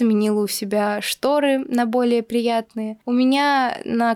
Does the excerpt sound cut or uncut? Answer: uncut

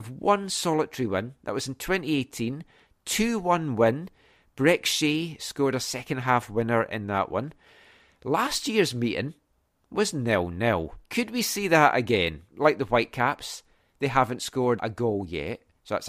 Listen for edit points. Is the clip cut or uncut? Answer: cut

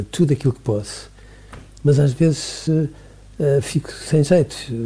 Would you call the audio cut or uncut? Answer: uncut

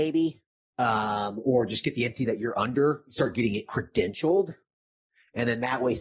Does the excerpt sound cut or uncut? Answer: uncut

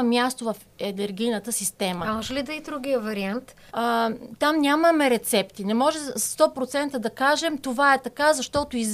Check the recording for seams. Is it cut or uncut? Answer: cut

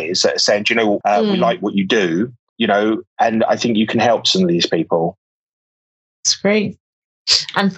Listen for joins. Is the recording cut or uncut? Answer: cut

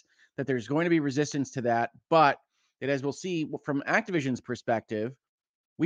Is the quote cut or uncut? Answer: uncut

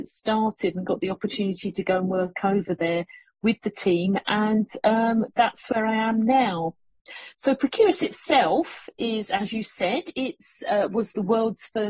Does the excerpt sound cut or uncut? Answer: uncut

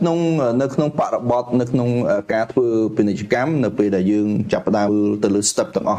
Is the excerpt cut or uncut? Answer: cut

